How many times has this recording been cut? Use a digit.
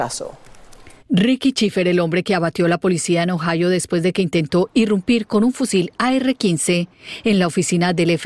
1